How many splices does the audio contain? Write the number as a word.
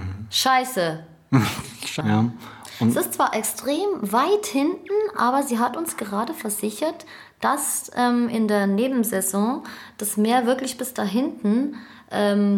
one